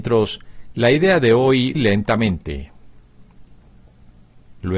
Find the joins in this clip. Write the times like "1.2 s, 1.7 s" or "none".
1.7 s